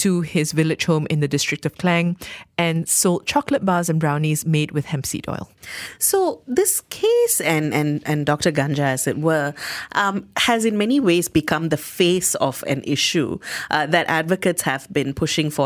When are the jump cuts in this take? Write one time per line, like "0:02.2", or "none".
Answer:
none